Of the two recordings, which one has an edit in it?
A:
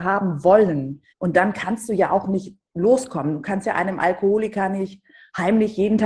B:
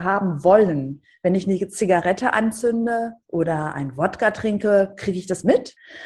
A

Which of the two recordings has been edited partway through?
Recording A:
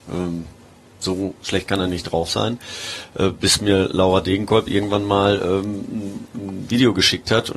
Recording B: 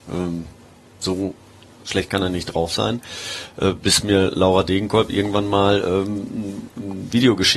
A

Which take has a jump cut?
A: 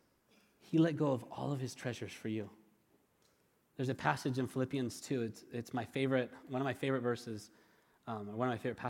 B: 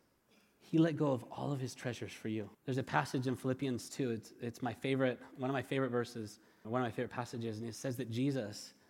B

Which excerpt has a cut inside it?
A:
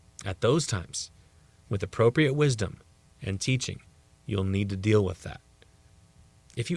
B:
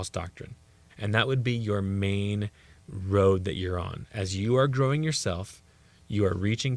B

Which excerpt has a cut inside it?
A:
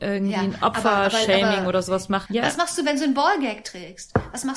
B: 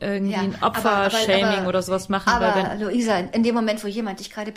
A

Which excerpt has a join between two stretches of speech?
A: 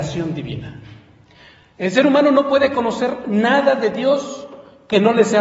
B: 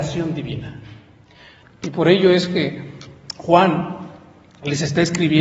B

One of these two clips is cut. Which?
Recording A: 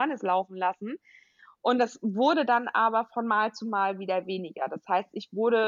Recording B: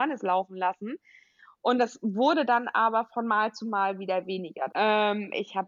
B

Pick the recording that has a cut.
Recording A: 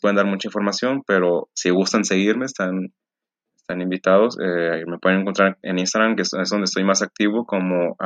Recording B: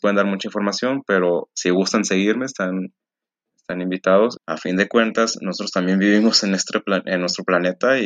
B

